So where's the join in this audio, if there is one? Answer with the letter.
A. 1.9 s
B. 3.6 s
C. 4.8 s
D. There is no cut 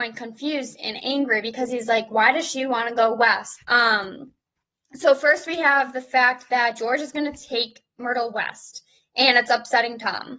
B